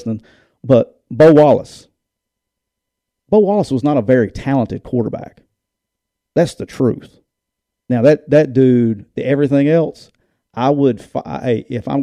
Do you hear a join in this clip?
no; 0 cuts

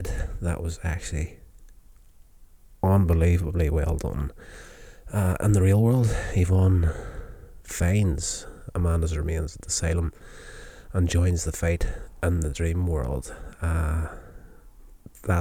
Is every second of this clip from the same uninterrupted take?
yes; 0 cuts

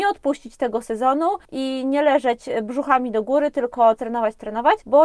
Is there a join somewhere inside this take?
yes; 1 cut; at 4.0 s

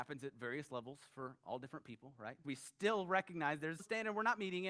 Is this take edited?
yes; 2 cuts; at 2.4 s, 3.8 s

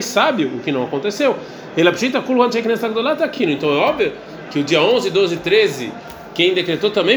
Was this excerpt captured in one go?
yes; 0 cuts

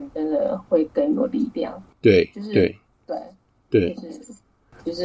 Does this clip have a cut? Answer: no; 0 cuts

